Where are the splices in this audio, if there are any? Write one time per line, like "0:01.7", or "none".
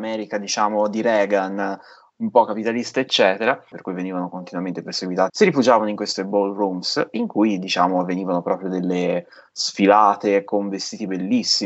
0:03.7
0:05.3